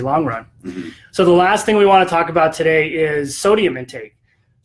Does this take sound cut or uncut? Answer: uncut